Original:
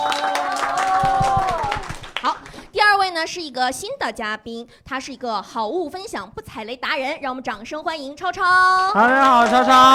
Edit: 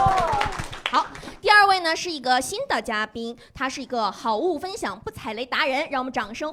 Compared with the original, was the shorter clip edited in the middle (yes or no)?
no